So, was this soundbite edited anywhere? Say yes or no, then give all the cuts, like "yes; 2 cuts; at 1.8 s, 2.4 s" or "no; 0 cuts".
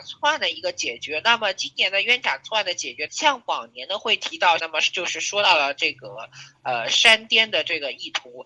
yes; 2 cuts; at 3.1 s, 4.6 s